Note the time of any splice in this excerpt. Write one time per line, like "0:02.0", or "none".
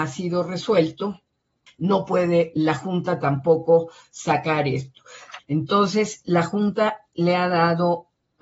0:01.7
0:05.4